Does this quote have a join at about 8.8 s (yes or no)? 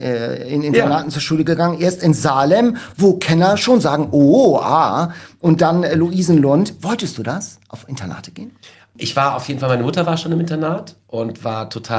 no